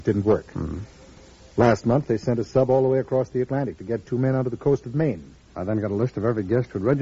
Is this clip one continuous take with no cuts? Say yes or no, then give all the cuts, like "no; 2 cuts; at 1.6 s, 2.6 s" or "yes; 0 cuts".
no; 1 cut; at 5.5 s